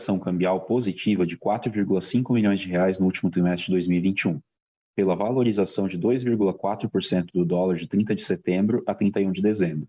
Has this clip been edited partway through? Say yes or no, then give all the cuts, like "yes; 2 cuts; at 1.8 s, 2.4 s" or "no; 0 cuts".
no; 0 cuts